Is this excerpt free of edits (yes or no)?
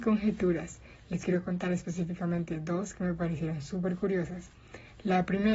yes